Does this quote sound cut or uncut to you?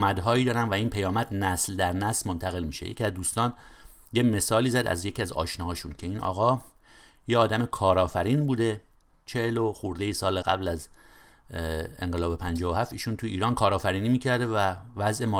cut